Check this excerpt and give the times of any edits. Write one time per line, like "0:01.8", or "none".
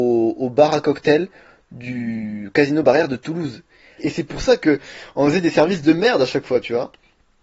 0:04.0